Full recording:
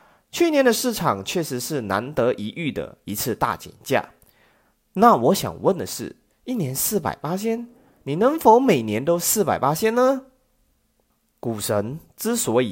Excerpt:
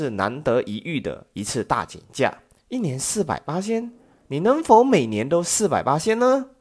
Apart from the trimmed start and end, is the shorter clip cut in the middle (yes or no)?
yes